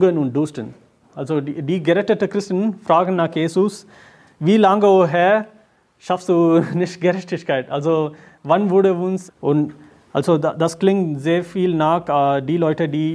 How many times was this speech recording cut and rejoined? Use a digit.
2